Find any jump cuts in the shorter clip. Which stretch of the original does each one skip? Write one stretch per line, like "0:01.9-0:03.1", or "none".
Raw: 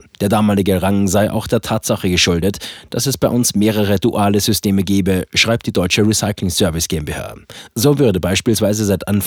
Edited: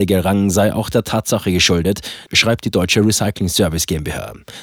0:02.8-0:05.3